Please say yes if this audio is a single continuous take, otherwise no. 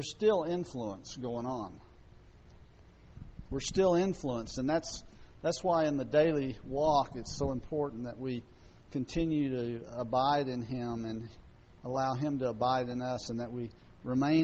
yes